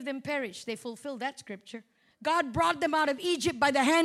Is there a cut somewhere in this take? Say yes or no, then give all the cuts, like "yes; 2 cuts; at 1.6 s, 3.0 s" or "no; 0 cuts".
yes; 1 cut; at 2.1 s